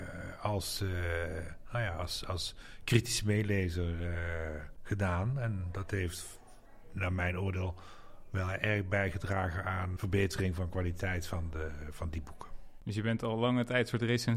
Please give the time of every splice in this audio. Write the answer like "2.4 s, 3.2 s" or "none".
10.0 s